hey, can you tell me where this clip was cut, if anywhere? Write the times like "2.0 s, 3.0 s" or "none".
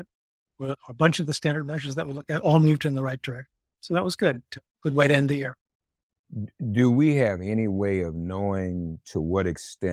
none